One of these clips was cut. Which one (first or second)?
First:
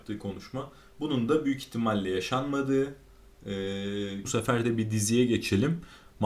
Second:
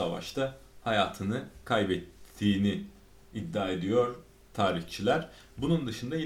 first